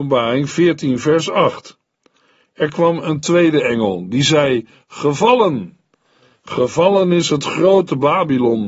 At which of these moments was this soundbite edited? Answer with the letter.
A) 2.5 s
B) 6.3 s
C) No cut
C